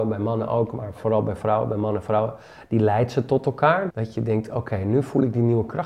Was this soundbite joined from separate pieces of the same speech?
yes; 1 cut; at 3.9 s

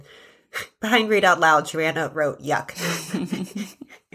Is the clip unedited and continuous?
yes; 0 cuts

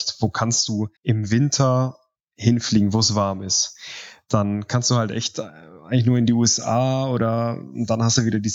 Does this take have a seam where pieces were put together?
yes; 1 cut; at 1.0 s

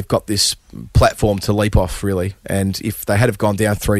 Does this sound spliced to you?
yes; 1 cut; at 1.4 s

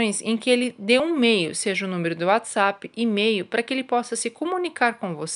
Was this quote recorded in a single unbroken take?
yes; 0 cuts

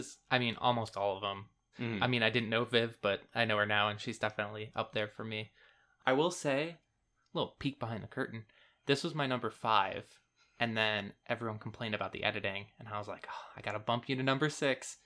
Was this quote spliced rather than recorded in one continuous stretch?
yes; 1 cut; at 1.7 s

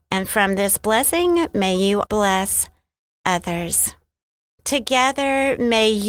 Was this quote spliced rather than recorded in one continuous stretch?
yes; 2 cuts; at 2.1 s, 4.6 s

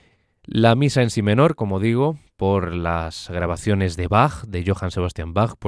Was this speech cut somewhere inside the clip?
yes; 1 cut; at 1.6 s

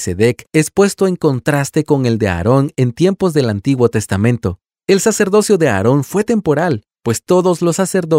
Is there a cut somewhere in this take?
no; 0 cuts

